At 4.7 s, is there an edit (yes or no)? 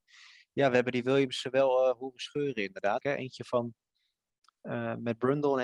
no